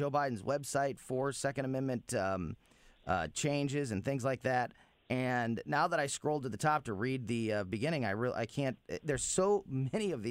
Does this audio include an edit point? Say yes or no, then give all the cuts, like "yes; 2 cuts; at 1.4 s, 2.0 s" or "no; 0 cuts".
no; 0 cuts